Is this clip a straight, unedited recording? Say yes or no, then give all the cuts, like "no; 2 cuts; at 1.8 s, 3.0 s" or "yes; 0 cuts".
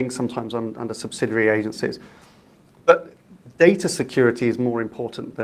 yes; 0 cuts